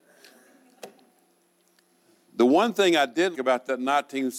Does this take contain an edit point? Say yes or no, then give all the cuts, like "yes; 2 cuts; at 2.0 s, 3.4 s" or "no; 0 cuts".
yes; 1 cut; at 3.3 s